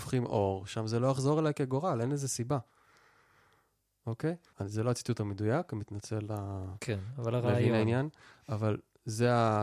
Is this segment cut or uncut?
cut